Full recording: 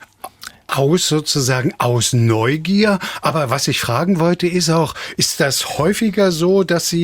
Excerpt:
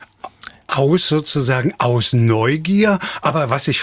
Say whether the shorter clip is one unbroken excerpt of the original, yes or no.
yes